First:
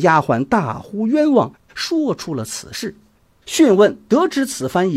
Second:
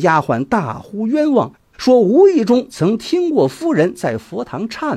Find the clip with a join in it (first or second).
first